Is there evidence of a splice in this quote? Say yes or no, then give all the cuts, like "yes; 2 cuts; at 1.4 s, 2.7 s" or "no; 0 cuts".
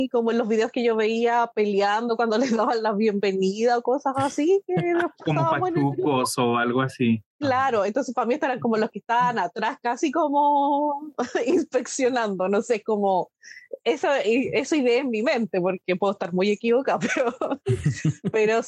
no; 0 cuts